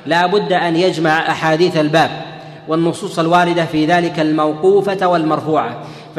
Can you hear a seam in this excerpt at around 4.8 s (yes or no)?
no